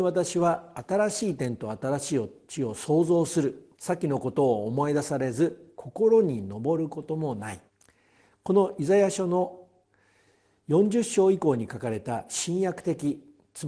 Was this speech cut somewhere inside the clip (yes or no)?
yes